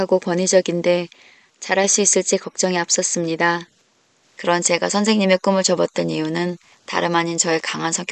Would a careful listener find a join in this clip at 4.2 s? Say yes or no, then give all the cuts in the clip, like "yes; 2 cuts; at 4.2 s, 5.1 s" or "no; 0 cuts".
yes; 1 cut; at 4.2 s